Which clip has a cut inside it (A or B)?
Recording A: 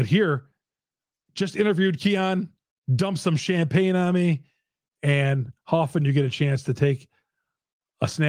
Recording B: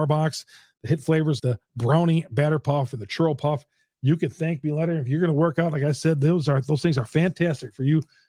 B